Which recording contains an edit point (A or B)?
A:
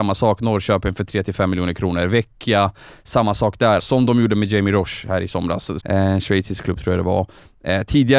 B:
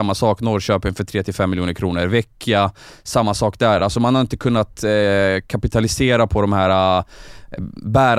A